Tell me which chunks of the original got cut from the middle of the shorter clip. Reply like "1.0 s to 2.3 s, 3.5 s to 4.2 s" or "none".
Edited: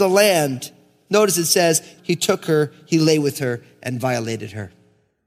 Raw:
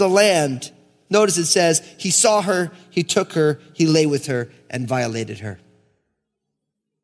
2.0 s to 2.8 s

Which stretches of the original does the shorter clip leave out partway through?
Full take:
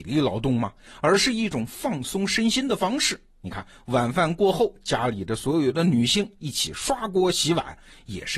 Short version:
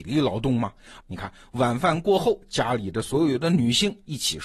1.0 s to 3.3 s

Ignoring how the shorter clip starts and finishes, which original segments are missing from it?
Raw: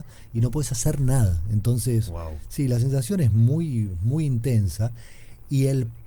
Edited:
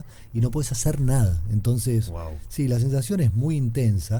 3.3 s to 4.0 s

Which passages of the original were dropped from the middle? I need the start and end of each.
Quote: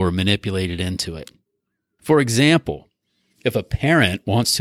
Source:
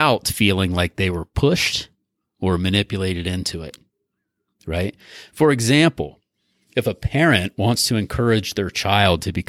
4.5 s to 5.3 s

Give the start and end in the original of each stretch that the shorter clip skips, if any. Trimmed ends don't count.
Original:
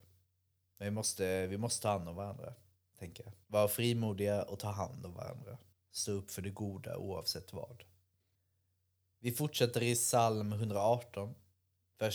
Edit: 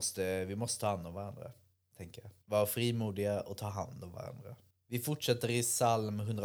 5.8 s to 9.1 s

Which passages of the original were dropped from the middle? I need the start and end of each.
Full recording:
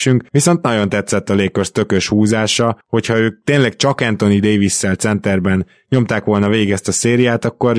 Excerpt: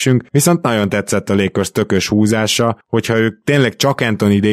none

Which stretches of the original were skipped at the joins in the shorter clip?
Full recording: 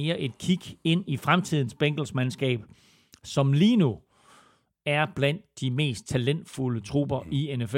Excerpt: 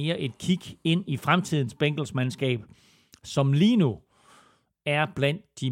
none

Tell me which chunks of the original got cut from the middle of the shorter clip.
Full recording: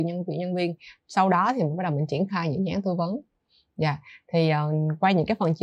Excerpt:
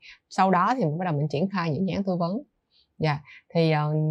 none

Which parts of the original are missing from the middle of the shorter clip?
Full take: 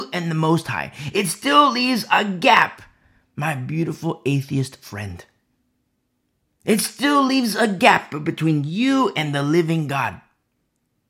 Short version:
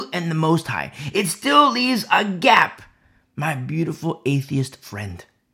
none

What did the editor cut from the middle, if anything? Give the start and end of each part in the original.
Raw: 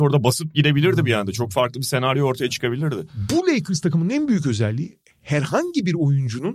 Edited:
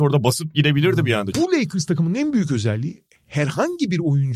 1.3 s to 3.3 s

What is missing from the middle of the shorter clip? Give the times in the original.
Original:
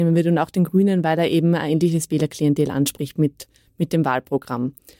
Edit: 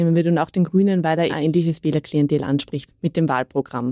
1.3 s to 1.6 s, 3.1 s to 3.6 s

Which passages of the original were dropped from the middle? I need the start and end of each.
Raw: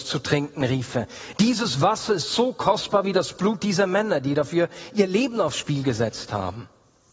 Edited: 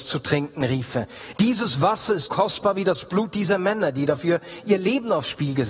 2.3 s to 2.5 s

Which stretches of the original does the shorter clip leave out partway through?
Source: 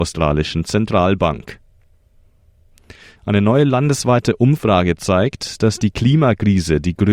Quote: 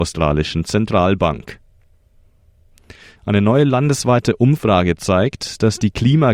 none

